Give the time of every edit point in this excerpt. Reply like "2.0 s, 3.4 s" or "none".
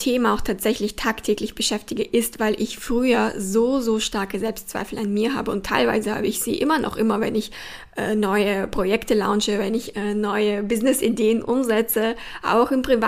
none